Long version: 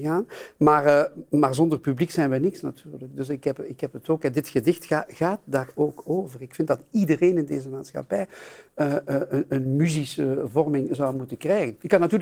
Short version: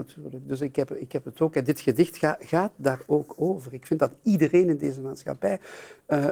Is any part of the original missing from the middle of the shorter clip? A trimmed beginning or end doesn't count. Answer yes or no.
no